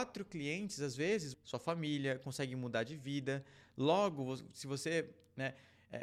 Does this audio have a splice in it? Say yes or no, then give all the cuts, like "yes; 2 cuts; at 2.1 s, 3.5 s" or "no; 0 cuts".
yes; 1 cut; at 1.3 s